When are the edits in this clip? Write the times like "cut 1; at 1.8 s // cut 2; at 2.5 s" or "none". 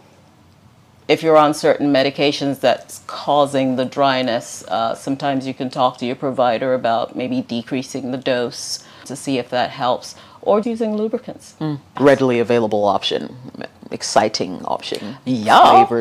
cut 1; at 9.0 s // cut 2; at 10.6 s // cut 3; at 12.0 s